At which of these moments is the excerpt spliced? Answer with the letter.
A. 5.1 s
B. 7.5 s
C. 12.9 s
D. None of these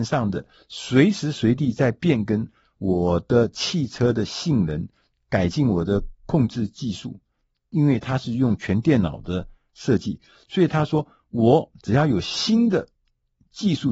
A